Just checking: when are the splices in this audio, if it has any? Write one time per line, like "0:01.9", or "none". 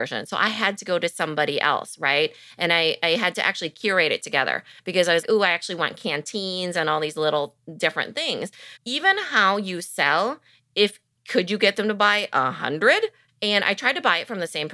0:05.2
0:08.8
0:13.3